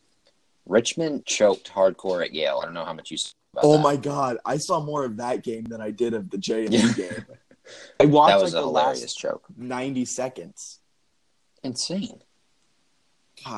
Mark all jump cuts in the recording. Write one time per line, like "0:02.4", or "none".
0:01.2